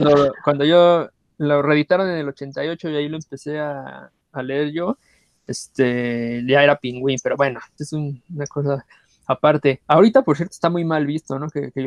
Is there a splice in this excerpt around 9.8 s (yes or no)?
no